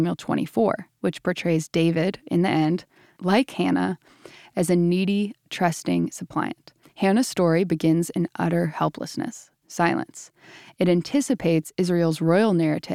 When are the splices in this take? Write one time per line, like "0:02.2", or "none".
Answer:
0:06.8